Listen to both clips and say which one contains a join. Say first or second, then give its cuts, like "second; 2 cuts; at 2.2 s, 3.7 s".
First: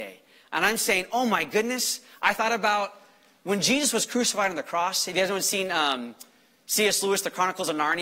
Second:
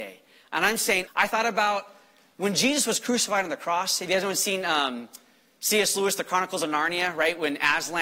second; 1 cut; at 1.1 s